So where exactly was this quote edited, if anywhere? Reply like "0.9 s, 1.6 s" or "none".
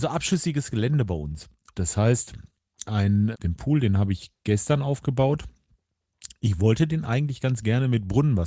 1.7 s, 3.3 s